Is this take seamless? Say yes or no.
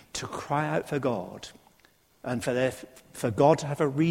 yes